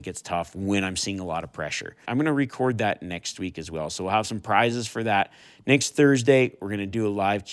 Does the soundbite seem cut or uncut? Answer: cut